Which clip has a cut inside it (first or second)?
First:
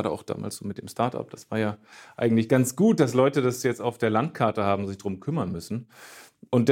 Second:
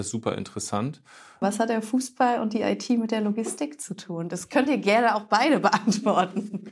second